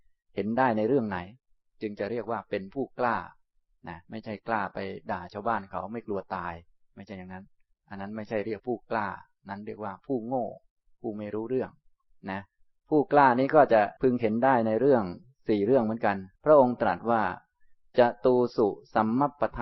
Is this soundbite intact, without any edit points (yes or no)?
no